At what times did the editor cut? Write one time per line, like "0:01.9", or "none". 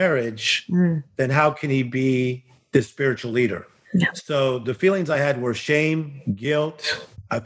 none